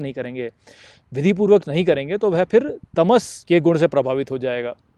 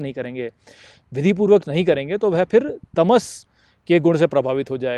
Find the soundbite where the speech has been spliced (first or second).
first